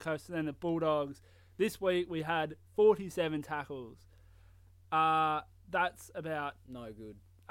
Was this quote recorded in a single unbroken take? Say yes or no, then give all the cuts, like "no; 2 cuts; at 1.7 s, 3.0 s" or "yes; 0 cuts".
yes; 0 cuts